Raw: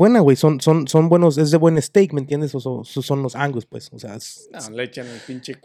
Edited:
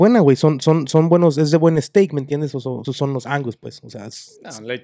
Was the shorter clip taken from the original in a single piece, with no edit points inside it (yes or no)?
no